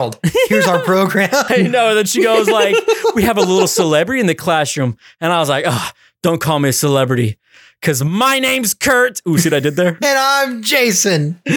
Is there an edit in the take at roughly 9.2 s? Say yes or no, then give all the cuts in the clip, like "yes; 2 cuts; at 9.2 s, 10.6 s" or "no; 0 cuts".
no; 1 cut; at 1.5 s